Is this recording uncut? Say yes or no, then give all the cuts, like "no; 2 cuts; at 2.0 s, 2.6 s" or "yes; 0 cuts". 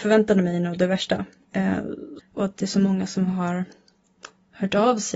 no; 1 cut; at 2.2 s